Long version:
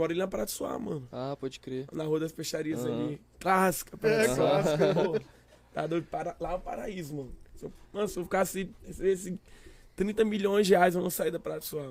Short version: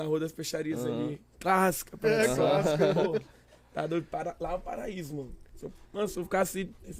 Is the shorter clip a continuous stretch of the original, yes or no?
yes